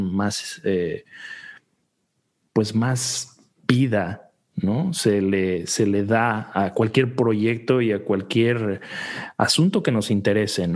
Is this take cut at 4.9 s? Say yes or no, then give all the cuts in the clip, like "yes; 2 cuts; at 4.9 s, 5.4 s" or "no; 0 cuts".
no; 0 cuts